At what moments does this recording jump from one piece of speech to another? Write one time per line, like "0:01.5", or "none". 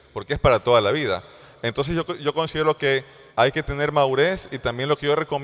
0:01.5
0:03.3